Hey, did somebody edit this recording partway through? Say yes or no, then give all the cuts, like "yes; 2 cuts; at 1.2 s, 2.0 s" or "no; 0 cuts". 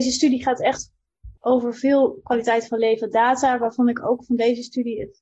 yes; 1 cut; at 1.4 s